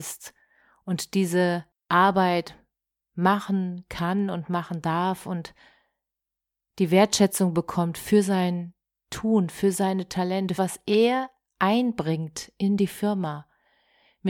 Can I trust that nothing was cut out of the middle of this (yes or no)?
no